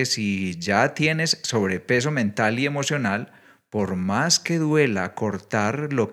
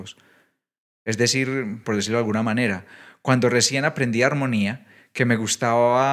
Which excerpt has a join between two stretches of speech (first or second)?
second